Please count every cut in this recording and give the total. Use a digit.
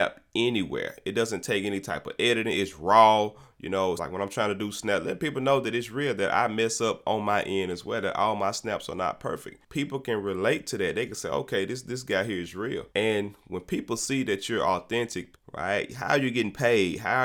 3